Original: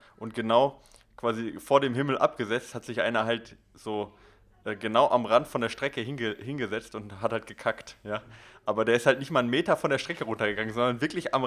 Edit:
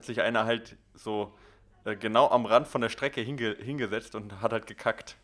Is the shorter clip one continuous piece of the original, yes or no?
yes